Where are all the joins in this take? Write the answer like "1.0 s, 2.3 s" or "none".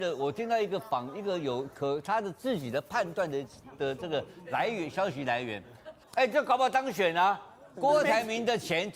6.0 s, 7.7 s